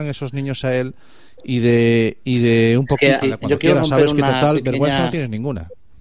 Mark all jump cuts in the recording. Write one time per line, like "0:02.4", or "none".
0:03.2